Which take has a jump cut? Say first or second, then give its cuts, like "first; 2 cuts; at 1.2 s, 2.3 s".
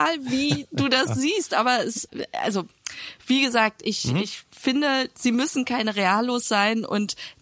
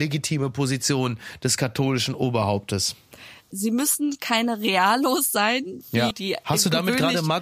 second; 2 cuts; at 3.5 s, 6.1 s